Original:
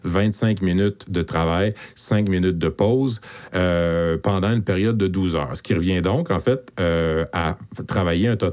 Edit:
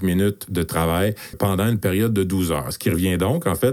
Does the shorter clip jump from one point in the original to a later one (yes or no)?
yes